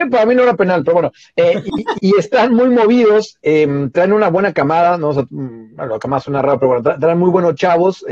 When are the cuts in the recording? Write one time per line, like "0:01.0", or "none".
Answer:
0:02.0